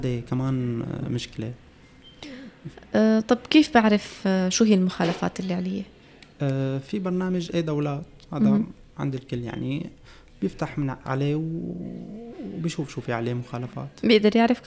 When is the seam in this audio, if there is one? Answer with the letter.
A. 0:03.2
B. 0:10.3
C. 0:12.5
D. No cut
D